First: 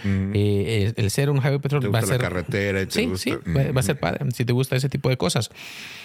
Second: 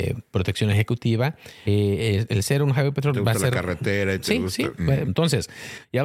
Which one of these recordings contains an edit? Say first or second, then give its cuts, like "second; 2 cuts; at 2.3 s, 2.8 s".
second; 2 cuts; at 1.7 s, 5.0 s